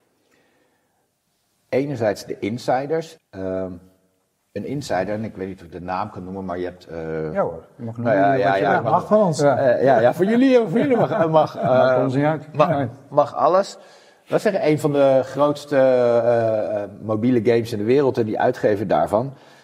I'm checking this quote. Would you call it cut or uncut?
cut